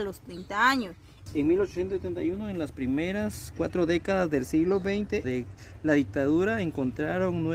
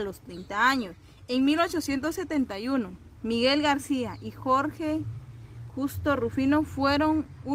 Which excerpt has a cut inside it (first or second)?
first